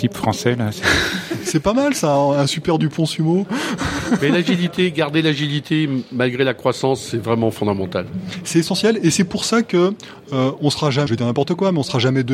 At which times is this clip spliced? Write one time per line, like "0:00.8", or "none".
0:11.1

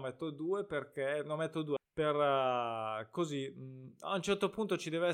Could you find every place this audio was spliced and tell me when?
0:01.8

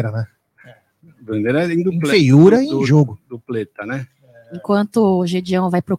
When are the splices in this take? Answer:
none

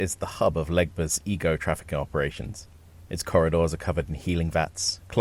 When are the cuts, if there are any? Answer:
none

